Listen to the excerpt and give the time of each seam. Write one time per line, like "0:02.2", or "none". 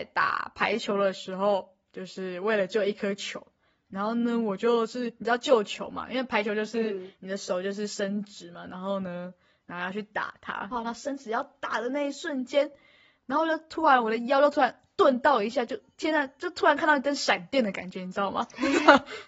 0:10.7

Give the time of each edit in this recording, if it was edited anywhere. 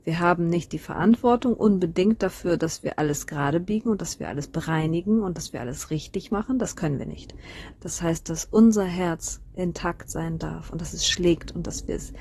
0:07.7

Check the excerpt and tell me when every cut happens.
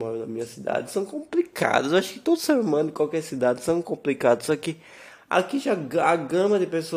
none

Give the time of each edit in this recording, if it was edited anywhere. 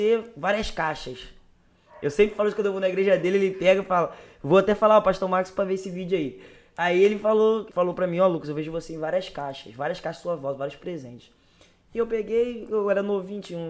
0:07.7

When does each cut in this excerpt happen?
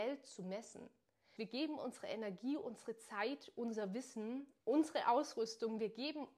0:01.4
0:04.6

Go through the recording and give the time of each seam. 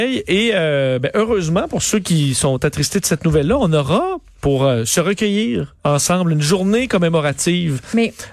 0:05.8

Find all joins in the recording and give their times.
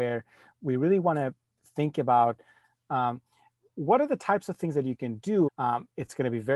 0:05.5

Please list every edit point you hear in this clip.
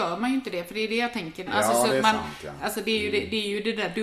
0:01.5

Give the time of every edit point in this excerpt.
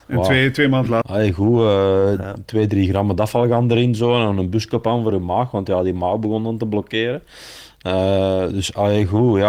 0:01.0

